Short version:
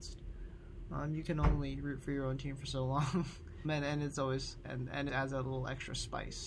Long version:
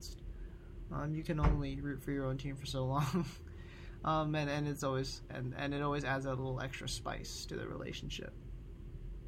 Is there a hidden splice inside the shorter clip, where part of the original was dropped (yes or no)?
yes